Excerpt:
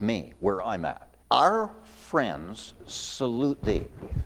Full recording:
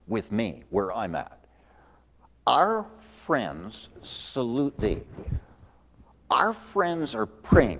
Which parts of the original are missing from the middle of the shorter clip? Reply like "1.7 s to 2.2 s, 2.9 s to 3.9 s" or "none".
1.5 s to 2.4 s

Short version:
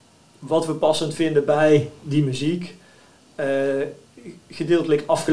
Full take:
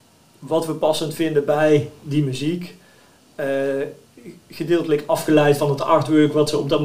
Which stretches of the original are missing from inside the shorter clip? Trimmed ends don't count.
none

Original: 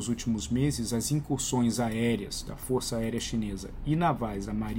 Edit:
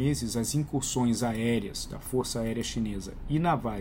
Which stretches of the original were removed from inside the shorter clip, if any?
none

